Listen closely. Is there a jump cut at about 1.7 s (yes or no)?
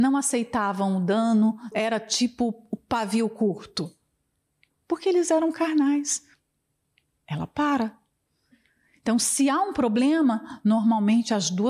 yes